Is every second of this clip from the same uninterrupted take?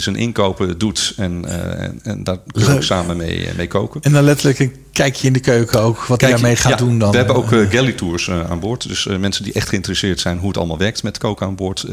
yes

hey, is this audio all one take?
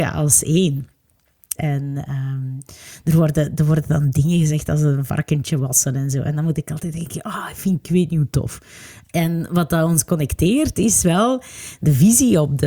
no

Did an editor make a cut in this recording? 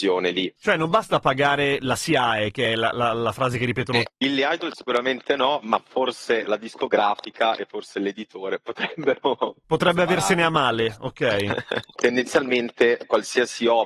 yes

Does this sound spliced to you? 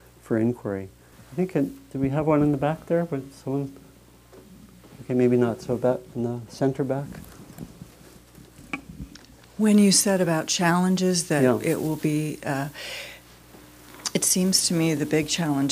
yes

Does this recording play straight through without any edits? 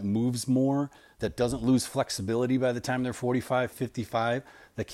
no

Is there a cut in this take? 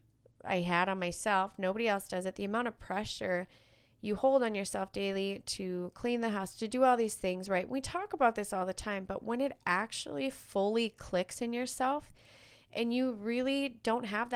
no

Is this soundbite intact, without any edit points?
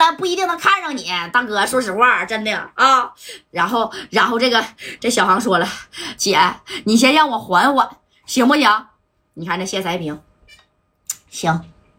no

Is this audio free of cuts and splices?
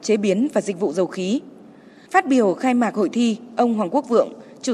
yes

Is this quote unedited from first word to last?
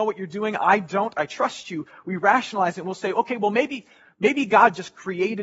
yes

